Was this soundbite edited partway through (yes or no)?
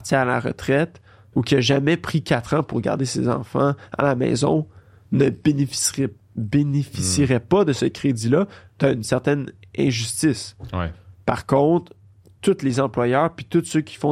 yes